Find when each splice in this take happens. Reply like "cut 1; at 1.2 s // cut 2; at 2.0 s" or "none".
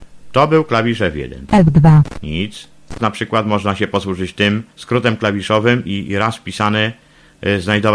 cut 1; at 1.5 s // cut 2; at 3.0 s // cut 3; at 4.7 s